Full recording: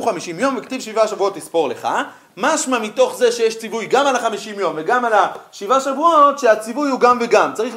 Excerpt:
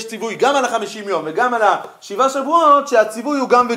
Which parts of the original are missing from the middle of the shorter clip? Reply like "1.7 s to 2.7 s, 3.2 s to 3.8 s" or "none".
none